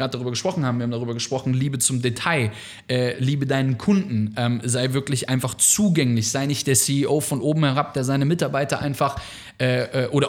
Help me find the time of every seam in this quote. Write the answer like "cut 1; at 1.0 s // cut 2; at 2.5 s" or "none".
none